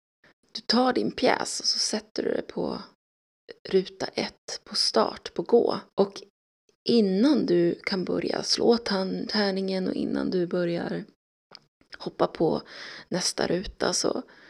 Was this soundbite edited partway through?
yes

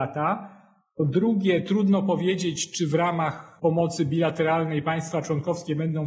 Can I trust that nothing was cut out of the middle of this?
yes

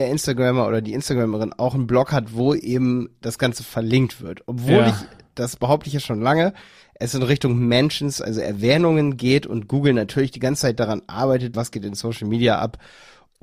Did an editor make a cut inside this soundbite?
yes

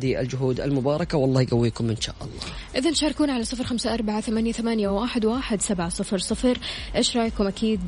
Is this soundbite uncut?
yes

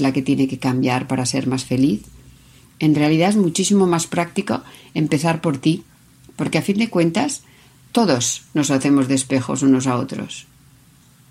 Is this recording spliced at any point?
no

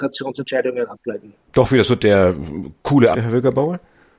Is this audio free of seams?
no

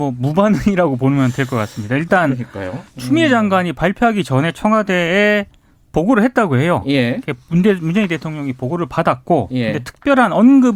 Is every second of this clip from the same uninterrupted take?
yes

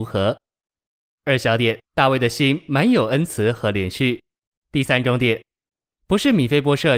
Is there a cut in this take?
yes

